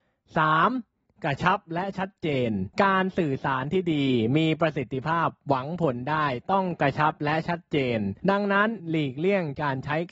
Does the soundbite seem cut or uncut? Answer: cut